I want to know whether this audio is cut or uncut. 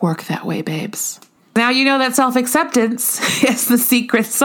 uncut